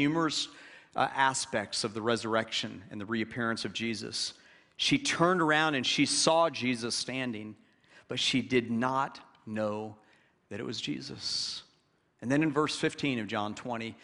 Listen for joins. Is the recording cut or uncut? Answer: uncut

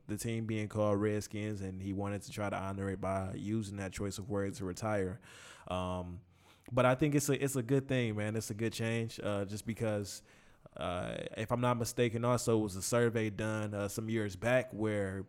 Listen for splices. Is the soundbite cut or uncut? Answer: uncut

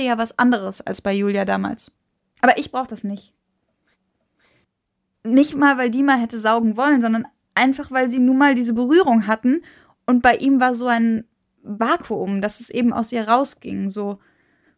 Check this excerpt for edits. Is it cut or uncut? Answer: cut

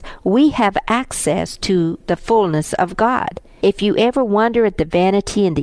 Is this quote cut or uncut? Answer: cut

